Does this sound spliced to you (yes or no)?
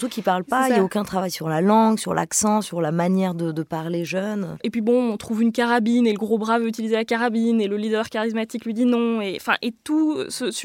no